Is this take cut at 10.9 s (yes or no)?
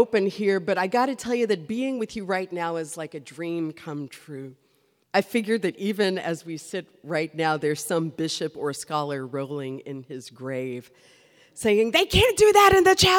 no